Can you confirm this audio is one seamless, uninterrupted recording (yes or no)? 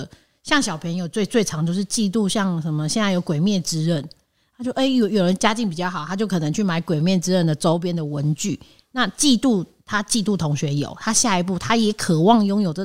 yes